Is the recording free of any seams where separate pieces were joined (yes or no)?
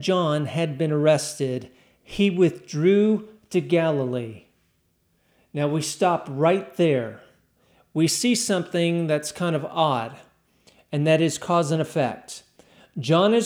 yes